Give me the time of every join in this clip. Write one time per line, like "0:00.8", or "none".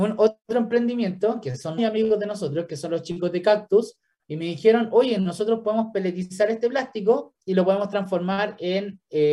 0:01.8